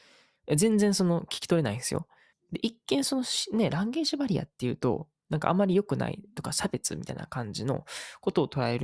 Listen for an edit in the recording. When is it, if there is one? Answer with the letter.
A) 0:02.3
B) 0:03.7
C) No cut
A